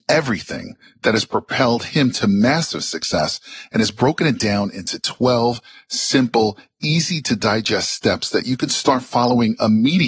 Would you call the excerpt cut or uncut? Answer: uncut